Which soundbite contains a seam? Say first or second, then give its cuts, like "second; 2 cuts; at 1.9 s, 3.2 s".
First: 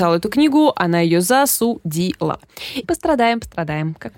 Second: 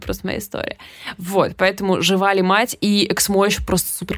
first; 1 cut; at 2.8 s